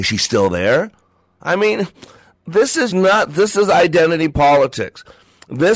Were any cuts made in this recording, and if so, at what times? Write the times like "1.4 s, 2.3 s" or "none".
2.9 s